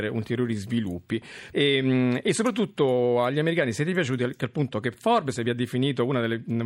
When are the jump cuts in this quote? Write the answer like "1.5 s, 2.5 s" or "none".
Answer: 1.5 s